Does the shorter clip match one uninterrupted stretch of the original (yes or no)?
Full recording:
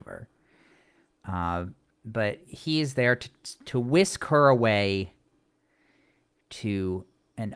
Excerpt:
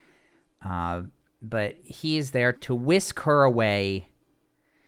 no